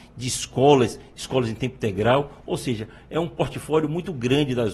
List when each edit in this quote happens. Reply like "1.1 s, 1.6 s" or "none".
none